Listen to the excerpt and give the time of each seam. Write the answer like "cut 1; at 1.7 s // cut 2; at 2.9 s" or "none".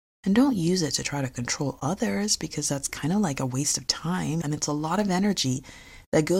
cut 1; at 4.4 s